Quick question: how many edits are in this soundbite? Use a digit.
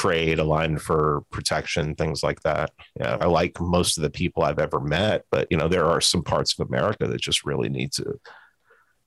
1